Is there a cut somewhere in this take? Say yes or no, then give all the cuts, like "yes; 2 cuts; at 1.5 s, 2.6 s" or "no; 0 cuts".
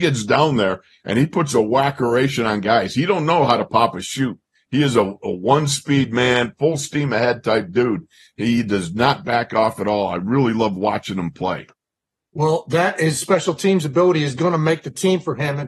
no; 0 cuts